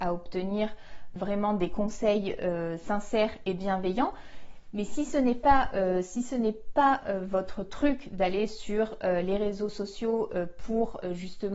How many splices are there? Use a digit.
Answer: 1